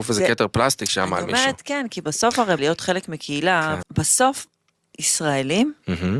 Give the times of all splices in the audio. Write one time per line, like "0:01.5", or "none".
0:02.6
0:03.8